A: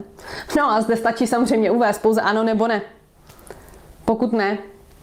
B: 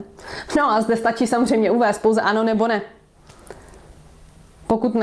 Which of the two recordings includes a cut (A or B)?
A